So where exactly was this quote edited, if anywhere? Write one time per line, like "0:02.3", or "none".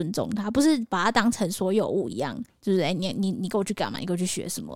none